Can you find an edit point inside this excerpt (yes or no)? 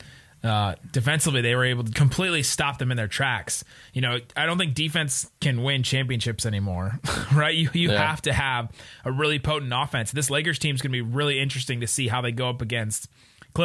yes